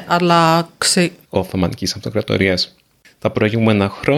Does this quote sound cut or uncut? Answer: cut